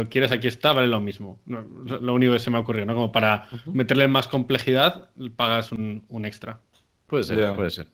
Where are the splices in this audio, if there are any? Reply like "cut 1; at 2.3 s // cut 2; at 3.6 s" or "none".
none